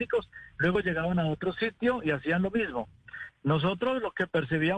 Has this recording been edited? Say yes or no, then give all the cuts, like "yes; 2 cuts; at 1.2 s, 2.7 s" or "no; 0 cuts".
yes; 1 cut; at 3.3 s